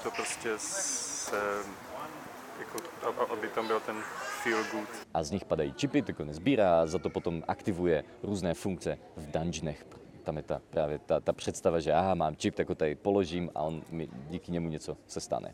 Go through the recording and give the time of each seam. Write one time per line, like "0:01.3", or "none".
0:05.0